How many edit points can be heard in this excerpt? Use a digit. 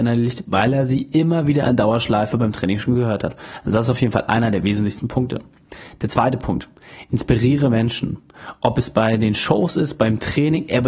0